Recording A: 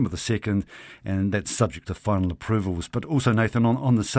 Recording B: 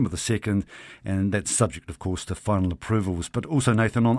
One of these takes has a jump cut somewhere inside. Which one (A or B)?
A